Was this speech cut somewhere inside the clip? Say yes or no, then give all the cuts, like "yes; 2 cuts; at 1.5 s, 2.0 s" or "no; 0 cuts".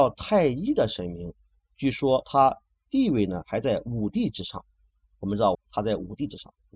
yes; 1 cut; at 5.5 s